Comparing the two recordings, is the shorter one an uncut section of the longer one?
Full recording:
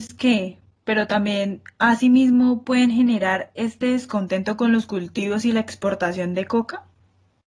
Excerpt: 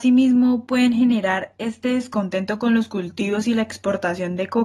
yes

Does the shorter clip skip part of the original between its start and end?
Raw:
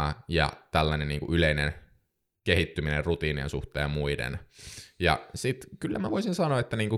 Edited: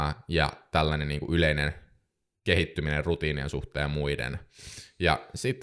no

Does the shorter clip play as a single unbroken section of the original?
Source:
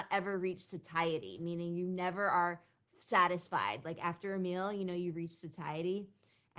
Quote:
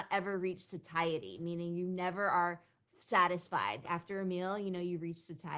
no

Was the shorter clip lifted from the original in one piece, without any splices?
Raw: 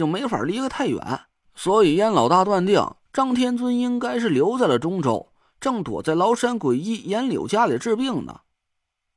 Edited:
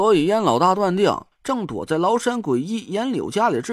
no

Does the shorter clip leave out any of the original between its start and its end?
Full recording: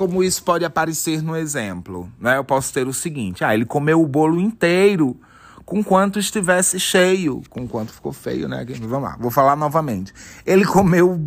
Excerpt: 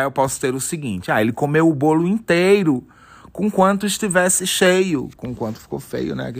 no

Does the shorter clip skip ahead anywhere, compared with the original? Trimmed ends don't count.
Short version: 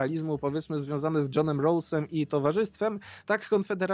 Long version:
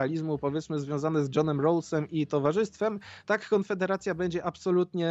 no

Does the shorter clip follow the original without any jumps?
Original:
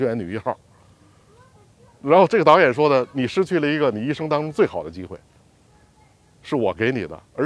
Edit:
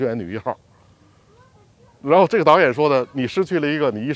yes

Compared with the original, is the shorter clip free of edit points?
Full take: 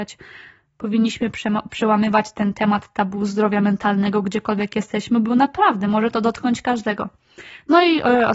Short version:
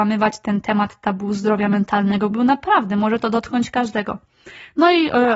no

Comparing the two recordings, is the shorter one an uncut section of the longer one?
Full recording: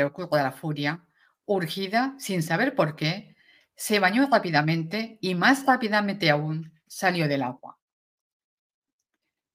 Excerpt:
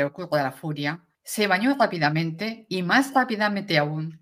no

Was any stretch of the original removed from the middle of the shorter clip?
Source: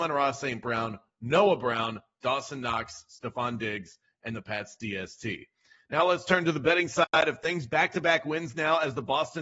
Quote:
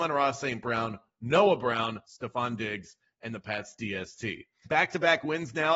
yes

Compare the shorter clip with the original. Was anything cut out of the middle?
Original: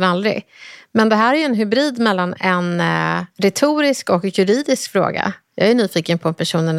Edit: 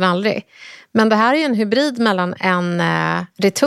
no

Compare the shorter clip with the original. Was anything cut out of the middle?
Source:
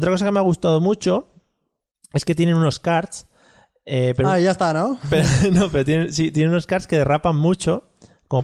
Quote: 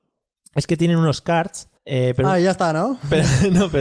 yes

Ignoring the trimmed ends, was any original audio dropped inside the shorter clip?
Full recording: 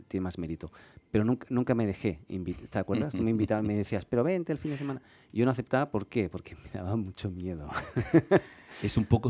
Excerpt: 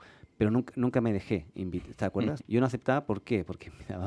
yes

